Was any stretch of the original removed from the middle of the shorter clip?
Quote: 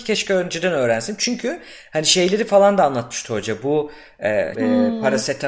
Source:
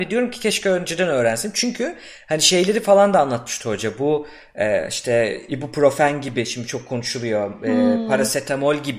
yes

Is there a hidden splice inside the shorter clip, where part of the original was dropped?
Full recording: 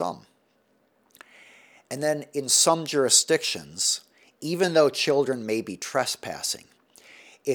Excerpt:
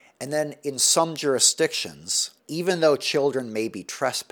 yes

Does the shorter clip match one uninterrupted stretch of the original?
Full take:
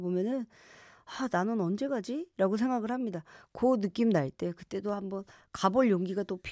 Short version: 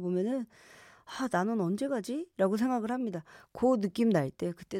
yes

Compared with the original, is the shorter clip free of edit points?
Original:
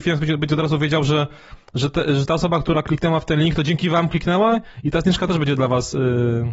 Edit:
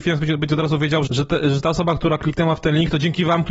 no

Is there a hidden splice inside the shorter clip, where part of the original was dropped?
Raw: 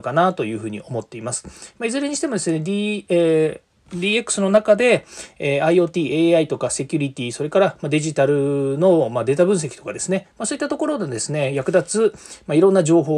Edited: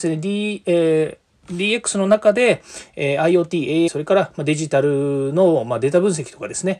yes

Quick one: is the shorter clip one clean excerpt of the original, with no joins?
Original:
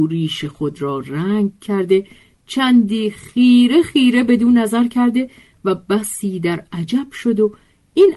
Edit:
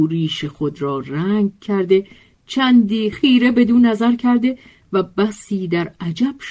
no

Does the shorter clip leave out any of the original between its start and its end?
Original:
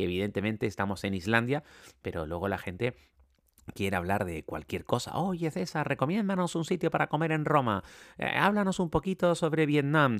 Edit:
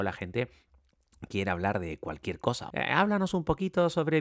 yes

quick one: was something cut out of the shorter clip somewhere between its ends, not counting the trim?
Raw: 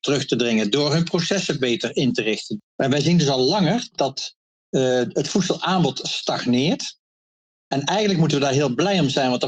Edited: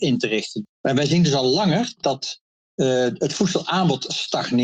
no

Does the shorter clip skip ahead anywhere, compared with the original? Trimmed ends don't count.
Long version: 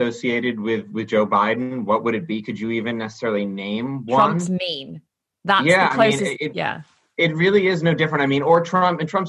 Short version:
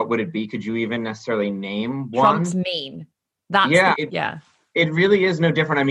yes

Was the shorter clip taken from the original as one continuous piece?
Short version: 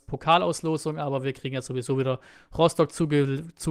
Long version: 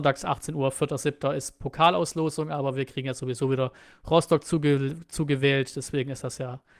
yes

